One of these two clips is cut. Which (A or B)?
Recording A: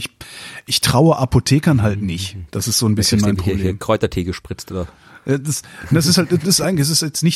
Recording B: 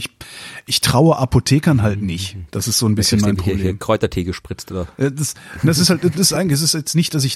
B